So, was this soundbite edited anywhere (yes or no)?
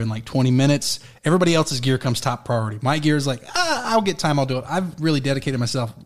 no